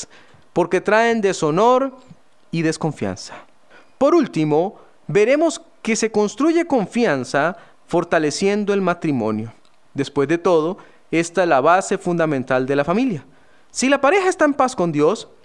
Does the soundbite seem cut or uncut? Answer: uncut